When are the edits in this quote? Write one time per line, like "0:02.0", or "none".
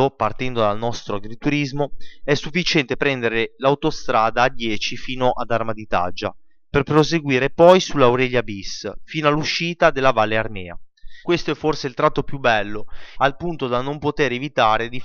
0:11.2
0:13.1